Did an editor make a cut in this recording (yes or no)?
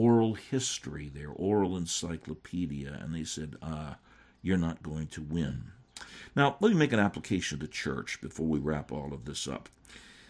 no